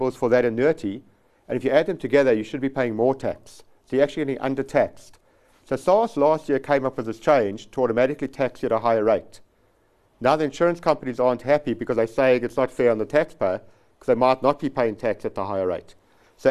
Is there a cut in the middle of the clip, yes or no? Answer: no